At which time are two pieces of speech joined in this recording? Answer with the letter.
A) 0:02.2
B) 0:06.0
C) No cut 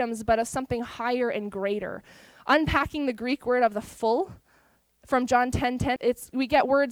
B